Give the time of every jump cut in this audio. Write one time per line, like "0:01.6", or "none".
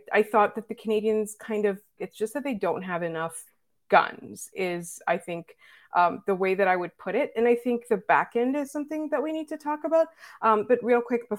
0:02.0